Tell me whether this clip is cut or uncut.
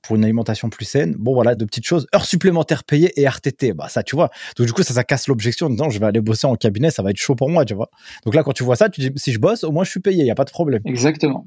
cut